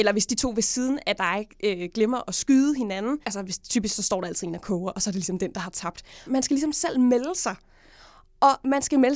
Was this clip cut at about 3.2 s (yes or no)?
yes